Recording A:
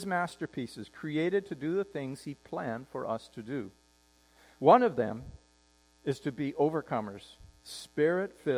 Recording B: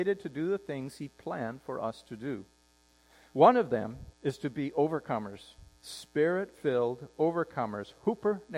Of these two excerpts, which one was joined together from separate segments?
B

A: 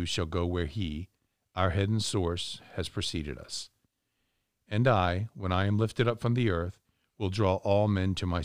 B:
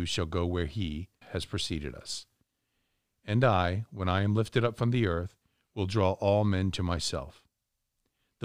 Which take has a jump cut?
B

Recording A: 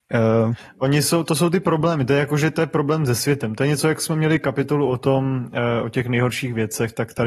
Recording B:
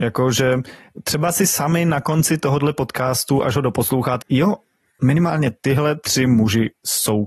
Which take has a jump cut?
B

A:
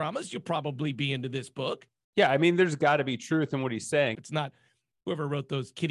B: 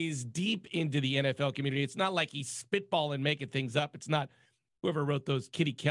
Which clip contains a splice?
A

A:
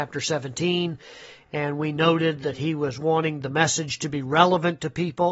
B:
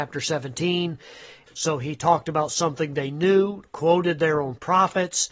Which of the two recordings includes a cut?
B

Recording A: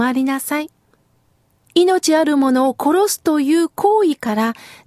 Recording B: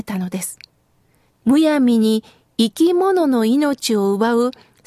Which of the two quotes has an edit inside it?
B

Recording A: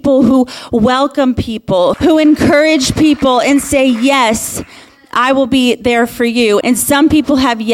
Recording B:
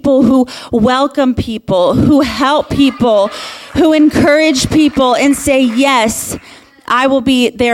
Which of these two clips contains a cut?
A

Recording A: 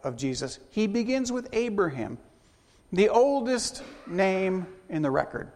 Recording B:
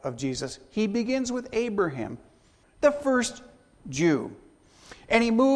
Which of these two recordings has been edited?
B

